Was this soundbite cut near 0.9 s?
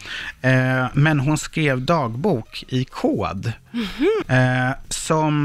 no; 1 cut; at 4.2 s

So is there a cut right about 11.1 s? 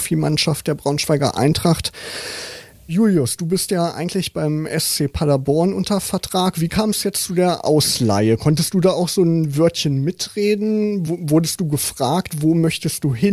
no; 0 cuts

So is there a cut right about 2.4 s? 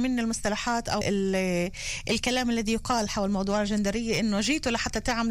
no; 1 cut; at 1.0 s

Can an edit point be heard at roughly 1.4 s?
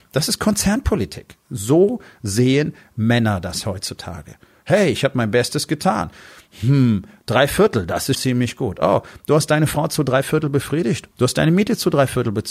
no; 2 cuts; at 8.1 s, 11.1 s

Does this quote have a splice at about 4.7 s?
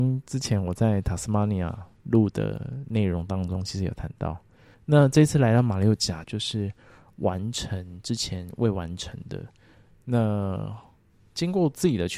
yes; 2 cuts; at 4.7 s, 6.2 s

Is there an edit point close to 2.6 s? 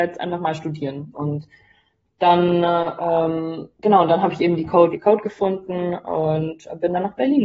no; 2 cuts; at 1.1 s, 4.9 s

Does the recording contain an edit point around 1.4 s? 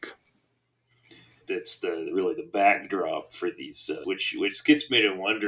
yes; 2 cuts; at 1.4 s, 4.0 s

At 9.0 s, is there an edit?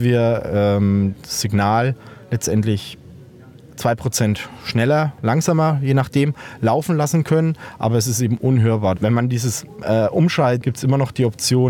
yes; 2 cuts; at 9.0 s, 10.6 s

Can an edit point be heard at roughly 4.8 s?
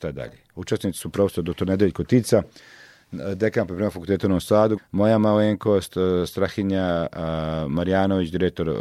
yes; 1 cut; at 4.8 s

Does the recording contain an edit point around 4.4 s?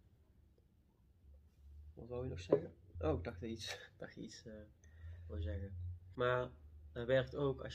no; 2 cuts; at 2.9 s, 6.1 s

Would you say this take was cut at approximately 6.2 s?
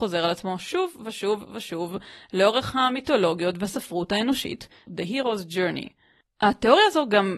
yes; 2 cuts; at 4.9 s, 6.2 s

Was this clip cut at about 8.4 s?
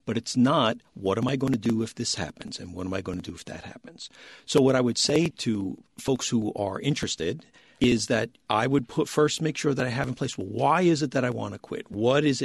no; 1 cut; at 5.3 s

